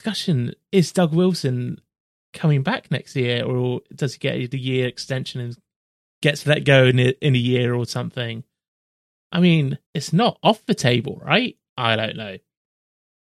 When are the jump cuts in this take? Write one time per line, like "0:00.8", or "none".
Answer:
0:09.8
0:11.7